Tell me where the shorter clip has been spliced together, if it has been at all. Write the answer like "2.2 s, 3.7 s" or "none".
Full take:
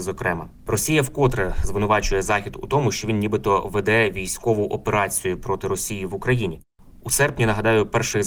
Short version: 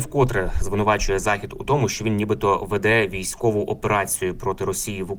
none